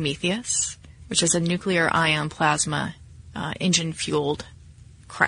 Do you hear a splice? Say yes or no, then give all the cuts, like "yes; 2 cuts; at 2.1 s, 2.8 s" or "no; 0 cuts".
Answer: no; 0 cuts